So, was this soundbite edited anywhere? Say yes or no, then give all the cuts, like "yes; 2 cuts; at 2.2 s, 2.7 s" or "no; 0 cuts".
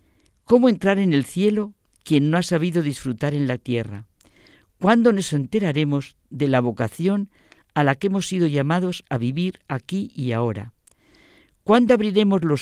no; 0 cuts